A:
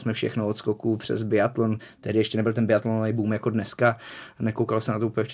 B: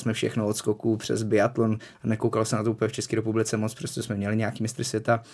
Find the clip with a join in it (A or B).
B